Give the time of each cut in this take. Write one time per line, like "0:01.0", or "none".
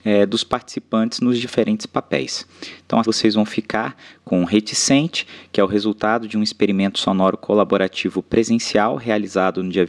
0:03.0